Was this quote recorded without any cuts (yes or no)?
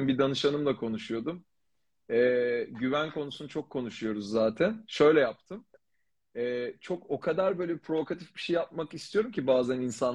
yes